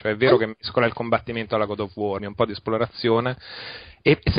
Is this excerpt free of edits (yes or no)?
no